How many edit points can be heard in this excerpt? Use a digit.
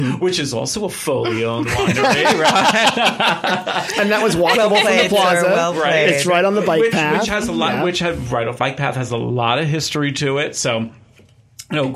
1